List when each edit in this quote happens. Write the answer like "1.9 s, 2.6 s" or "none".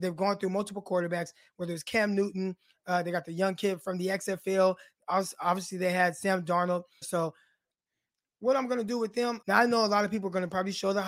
7.0 s, 9.4 s